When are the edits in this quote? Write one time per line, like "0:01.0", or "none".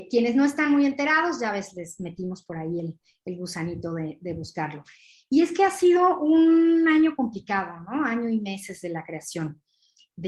none